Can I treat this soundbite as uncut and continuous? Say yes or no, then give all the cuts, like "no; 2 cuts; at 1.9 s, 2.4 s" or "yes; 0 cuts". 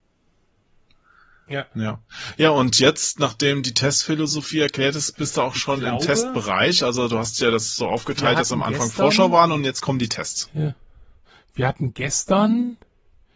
yes; 0 cuts